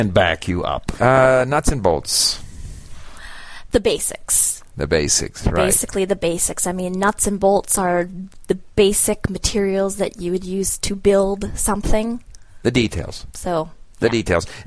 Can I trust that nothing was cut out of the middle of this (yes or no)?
no